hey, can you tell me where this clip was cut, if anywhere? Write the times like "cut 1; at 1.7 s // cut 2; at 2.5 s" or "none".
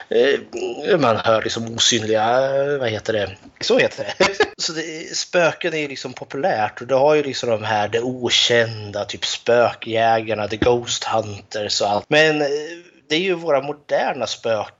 cut 1; at 3.6 s // cut 2; at 12.0 s